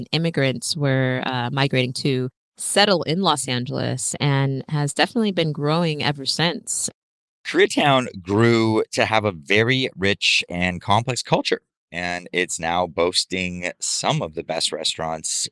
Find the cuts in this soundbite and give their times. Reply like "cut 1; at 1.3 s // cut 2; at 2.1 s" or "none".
none